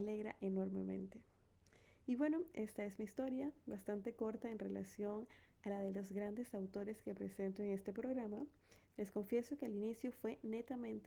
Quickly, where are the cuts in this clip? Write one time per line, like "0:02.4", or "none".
0:08.9